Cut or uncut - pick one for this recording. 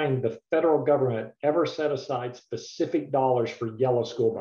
uncut